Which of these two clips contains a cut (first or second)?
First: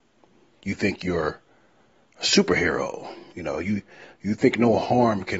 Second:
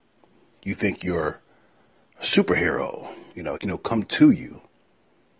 second